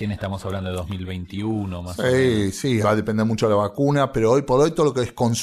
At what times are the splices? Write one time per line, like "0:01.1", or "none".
0:02.8